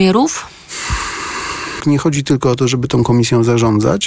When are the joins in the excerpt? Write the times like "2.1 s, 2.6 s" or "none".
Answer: 1.8 s